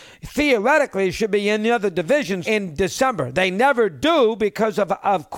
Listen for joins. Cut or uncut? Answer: cut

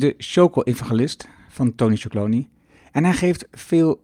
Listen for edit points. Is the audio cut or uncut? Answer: uncut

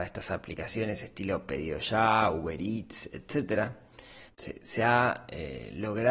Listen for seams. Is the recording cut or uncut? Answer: cut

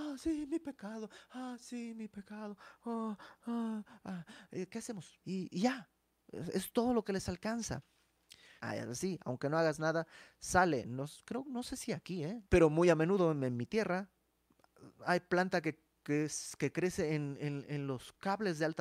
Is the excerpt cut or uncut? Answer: cut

